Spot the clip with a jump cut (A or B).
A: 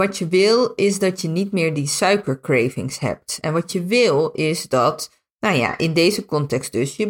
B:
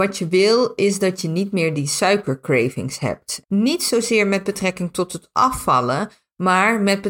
B